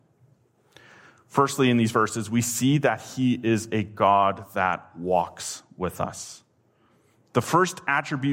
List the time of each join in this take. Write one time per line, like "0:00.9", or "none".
none